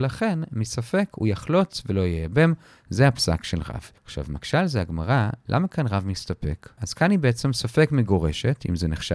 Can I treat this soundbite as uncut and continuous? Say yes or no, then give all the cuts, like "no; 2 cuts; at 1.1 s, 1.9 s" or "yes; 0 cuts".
no; 2 cuts; at 4.0 s, 6.8 s